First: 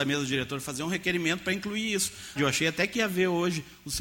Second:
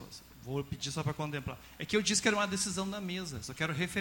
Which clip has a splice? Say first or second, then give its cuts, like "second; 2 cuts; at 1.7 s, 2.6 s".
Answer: first; 1 cut; at 2.4 s